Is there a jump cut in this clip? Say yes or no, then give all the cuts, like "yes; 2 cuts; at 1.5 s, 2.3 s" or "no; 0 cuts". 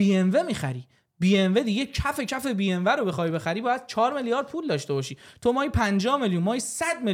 no; 0 cuts